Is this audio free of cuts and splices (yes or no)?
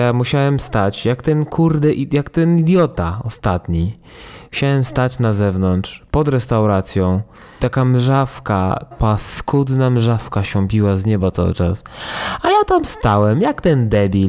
no